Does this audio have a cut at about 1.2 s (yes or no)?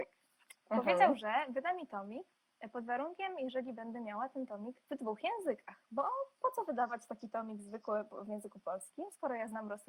no